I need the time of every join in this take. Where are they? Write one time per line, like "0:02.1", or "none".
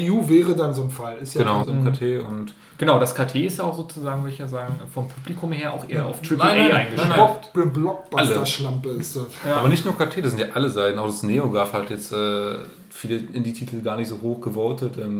0:01.6